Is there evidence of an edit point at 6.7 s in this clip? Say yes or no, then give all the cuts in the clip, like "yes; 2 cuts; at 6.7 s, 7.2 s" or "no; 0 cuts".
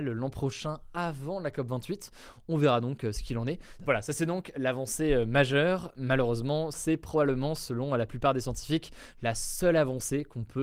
yes; 2 cuts; at 3.8 s, 6.7 s